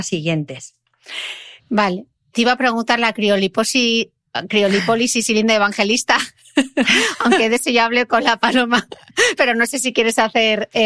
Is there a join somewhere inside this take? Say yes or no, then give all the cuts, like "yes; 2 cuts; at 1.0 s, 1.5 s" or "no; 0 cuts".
yes; 2 cuts; at 1.6 s, 9.4 s